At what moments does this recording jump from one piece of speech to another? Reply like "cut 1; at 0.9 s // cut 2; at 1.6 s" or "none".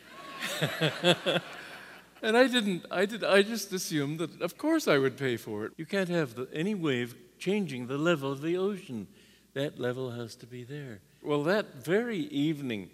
cut 1; at 5.7 s // cut 2; at 11.2 s